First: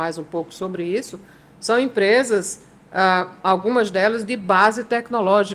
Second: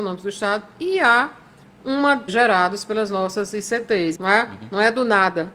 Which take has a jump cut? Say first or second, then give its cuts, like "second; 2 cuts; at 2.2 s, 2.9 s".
second; 2 cuts; at 2.3 s, 4.1 s